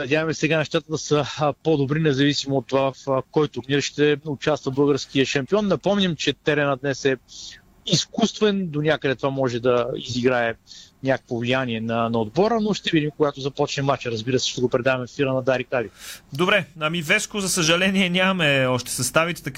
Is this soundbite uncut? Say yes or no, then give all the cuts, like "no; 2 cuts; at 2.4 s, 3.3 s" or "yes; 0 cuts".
yes; 0 cuts